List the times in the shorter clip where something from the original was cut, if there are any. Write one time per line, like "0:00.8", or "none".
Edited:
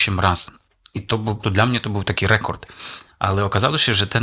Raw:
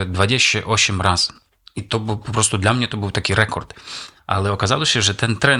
0:01.4